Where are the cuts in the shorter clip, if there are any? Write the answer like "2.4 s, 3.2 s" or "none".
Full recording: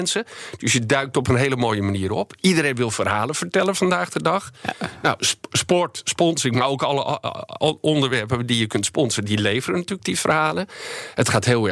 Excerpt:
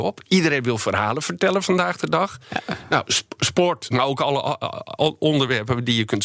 3.9 s